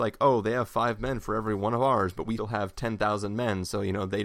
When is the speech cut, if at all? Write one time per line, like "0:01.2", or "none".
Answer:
0:02.4